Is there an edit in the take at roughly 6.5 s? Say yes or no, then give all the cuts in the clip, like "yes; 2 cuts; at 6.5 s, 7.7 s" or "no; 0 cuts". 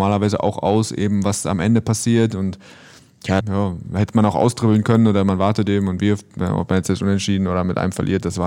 no; 1 cut; at 3.4 s